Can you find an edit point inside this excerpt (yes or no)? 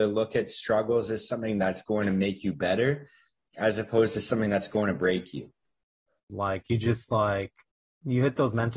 yes